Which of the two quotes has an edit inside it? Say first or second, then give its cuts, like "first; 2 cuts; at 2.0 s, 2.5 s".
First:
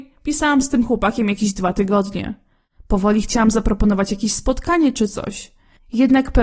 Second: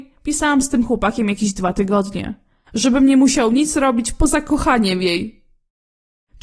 second; 1 cut; at 2.7 s